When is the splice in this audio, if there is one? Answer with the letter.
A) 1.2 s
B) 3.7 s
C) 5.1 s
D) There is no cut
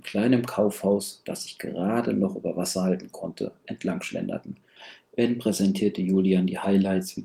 D